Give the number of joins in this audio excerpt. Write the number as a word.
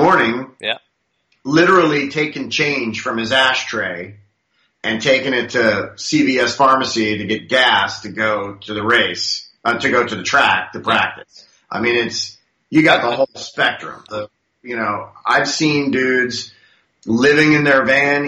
one